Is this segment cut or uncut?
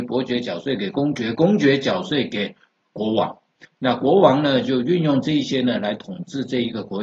uncut